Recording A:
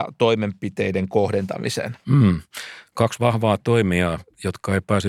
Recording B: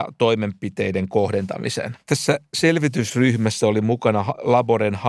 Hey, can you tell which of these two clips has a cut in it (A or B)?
B